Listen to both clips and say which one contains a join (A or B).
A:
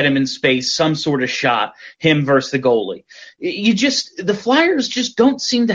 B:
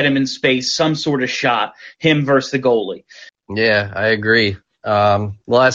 B